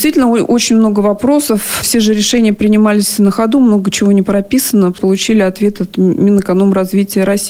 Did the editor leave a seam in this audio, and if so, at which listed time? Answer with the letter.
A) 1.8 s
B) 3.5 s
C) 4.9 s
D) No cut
C